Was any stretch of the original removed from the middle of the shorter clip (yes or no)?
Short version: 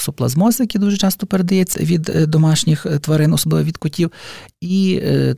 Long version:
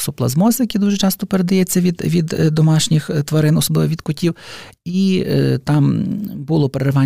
yes